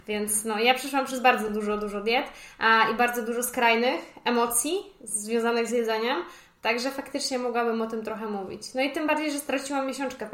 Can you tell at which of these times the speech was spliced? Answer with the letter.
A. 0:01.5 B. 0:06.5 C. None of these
C